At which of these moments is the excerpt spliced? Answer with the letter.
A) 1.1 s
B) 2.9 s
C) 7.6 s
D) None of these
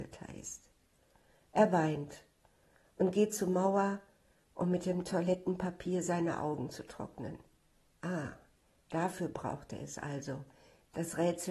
D